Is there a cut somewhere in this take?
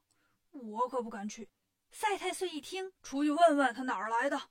yes; 2 cuts; at 1.5 s, 3.0 s

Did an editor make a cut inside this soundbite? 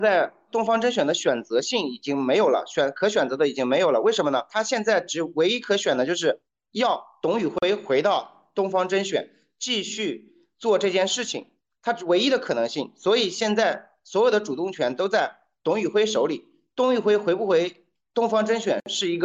yes; 1 cut; at 4.5 s

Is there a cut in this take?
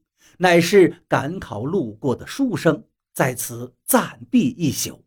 yes; 1 cut; at 3.1 s

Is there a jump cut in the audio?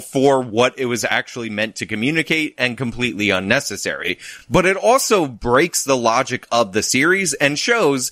no; 0 cuts

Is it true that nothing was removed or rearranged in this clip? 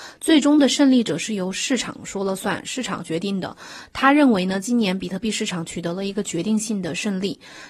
yes; 0 cuts

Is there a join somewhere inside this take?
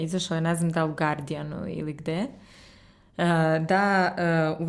no; 0 cuts

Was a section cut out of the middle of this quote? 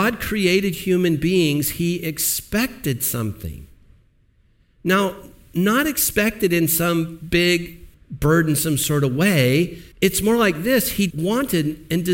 yes; 3 cuts; at 7.9 s, 9.9 s, 11.1 s

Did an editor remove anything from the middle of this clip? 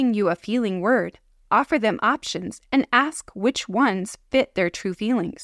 no; 0 cuts

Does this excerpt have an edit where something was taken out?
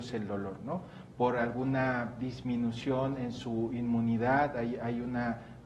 yes; 1 cut; at 1.1 s

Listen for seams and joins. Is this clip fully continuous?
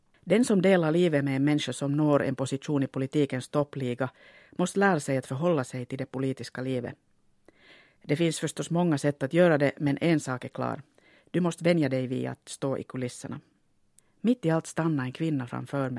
no; 1 cut; at 14.0 s

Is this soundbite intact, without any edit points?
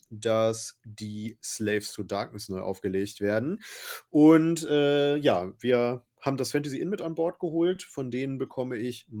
yes; 0 cuts

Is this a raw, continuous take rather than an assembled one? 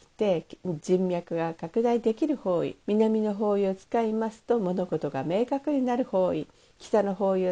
no; 1 cut; at 2.8 s

